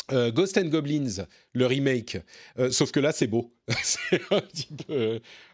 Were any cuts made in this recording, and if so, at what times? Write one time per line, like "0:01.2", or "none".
none